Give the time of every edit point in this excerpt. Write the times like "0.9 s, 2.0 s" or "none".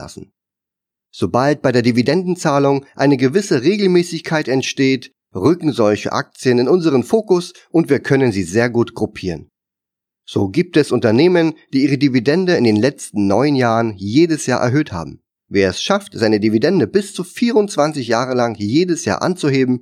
15.4 s